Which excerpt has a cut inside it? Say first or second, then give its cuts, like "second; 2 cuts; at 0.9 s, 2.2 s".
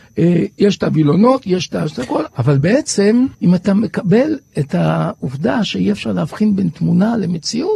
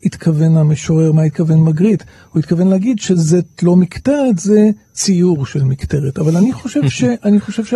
first; 2 cuts; at 2.3 s, 3.3 s